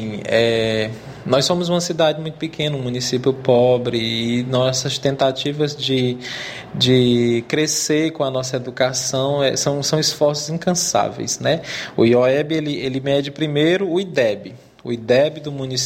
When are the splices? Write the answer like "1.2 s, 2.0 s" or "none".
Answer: none